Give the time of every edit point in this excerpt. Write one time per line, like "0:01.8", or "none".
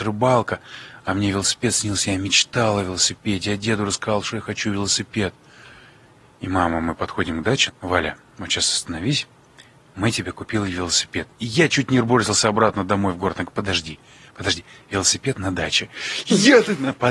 0:07.7

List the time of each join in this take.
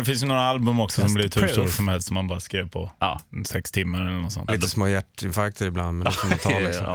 0:04.5

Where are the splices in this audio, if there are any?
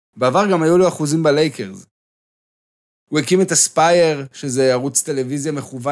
none

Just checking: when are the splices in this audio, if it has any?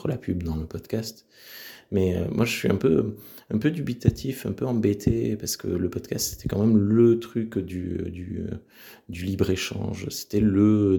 none

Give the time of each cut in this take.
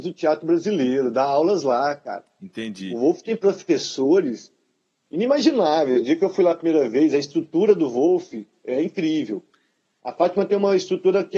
none

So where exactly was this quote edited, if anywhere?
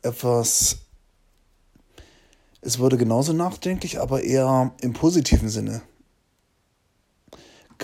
none

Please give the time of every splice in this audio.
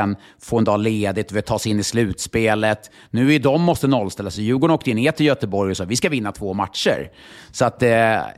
none

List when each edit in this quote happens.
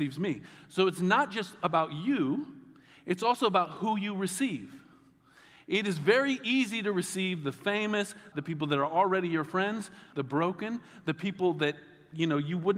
0:08.3
0:10.1

